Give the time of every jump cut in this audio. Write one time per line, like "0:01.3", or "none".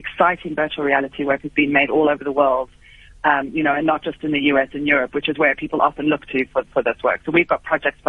none